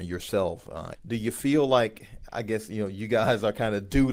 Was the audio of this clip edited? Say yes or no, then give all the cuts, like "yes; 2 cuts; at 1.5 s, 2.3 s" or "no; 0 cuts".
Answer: yes; 1 cut; at 0.9 s